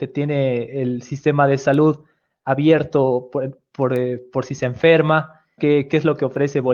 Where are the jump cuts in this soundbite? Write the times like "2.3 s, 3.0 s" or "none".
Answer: 5.6 s